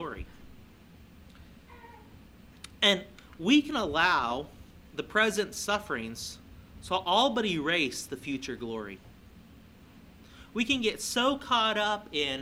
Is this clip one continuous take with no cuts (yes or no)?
yes